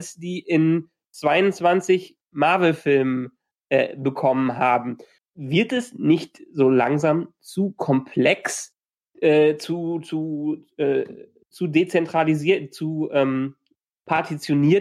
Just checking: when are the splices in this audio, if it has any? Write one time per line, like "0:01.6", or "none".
0:05.2
0:09.0